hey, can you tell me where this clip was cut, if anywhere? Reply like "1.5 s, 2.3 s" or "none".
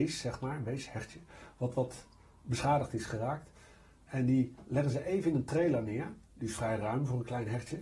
6.3 s